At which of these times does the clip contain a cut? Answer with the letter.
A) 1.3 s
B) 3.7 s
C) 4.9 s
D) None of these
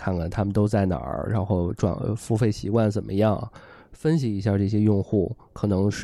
D